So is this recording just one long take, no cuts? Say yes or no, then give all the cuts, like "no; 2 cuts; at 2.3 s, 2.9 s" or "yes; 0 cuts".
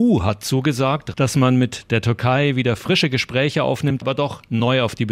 no; 2 cuts; at 1.1 s, 4.0 s